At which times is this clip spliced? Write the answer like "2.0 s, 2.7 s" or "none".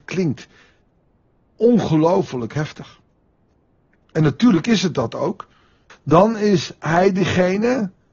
5.9 s